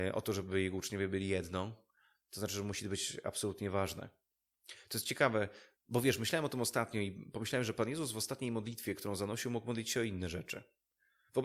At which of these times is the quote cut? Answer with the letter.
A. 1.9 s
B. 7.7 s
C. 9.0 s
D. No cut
D